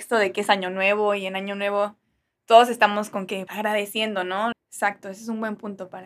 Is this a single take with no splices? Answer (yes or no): no